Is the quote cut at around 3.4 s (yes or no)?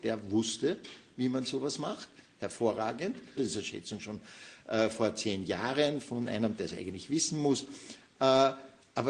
yes